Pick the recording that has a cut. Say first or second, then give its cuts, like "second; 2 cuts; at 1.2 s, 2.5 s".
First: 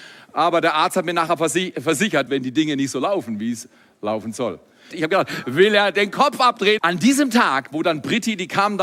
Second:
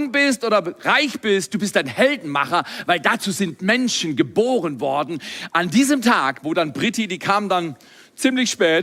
first; 3 cuts; at 2.3 s, 4.9 s, 6.8 s